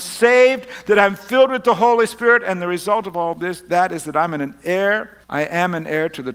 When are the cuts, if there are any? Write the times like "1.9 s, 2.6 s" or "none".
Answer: 5.2 s